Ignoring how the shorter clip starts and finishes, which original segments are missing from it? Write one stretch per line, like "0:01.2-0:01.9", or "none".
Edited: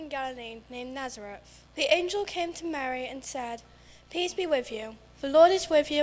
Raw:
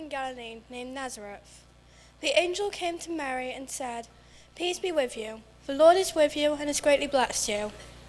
0:01.7-0:02.1